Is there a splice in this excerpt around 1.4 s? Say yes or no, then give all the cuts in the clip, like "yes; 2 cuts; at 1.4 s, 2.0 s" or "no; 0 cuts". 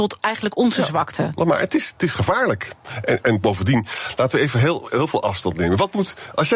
yes; 1 cut; at 1.4 s